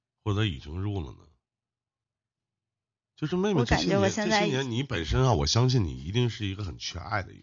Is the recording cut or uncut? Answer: uncut